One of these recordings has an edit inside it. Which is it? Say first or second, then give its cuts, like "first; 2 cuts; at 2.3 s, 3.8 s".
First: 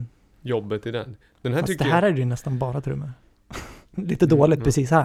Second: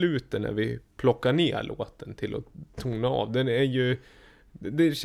first; 1 cut; at 3.9 s